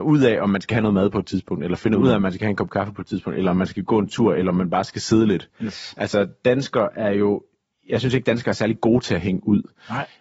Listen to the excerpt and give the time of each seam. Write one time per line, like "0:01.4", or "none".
none